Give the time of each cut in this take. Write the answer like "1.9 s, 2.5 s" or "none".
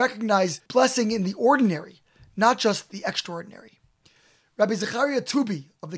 none